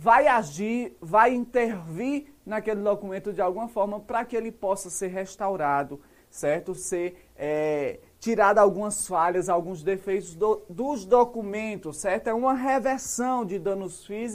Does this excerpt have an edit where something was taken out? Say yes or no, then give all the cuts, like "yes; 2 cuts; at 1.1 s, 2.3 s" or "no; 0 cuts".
no; 0 cuts